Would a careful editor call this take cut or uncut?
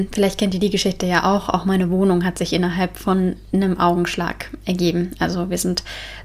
uncut